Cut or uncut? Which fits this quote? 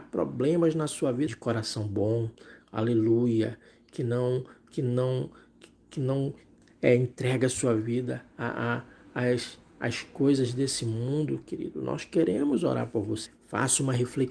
cut